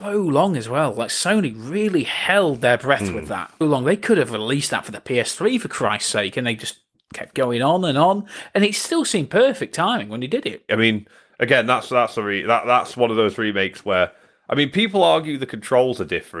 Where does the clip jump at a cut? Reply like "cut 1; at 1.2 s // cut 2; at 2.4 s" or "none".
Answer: cut 1; at 3.6 s // cut 2; at 10.7 s